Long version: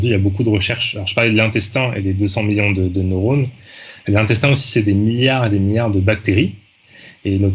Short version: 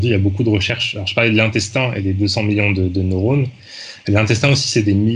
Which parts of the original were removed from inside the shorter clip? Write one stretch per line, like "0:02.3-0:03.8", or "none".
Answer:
none